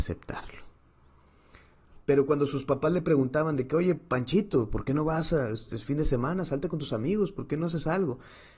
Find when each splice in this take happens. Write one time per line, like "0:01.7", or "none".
0:02.0